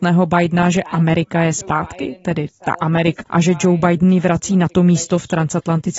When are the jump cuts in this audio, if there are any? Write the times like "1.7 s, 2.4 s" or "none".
3.2 s